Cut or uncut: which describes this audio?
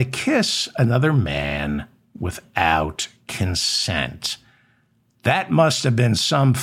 uncut